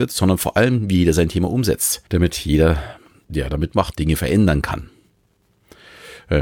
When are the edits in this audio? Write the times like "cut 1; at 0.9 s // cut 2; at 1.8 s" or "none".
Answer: cut 1; at 2.1 s // cut 2; at 3.9 s